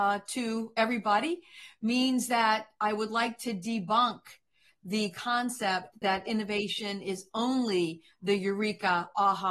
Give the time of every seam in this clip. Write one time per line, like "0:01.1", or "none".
none